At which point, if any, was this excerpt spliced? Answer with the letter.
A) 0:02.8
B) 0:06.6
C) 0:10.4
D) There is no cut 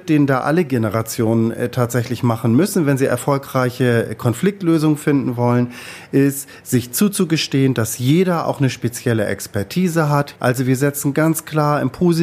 C